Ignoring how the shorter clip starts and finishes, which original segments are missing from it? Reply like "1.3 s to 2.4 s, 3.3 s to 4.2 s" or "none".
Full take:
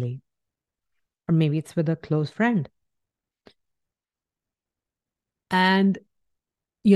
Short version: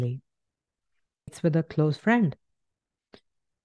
1.3 s to 1.6 s